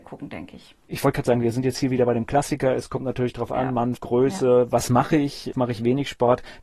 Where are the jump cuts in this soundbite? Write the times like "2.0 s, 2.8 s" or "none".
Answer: 4.0 s, 5.5 s